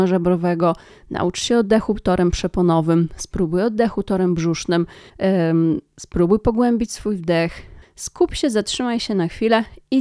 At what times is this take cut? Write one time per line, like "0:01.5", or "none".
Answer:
0:05.1
0:07.8